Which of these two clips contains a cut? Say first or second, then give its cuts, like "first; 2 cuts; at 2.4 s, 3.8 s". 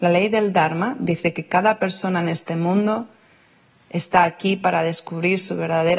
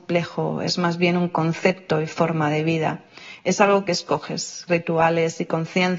second; 1 cut; at 4.7 s